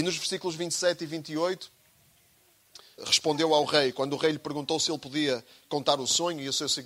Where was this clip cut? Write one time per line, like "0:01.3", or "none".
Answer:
0:03.0